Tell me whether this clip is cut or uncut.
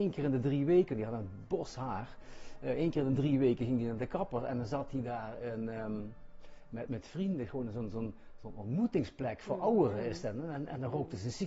cut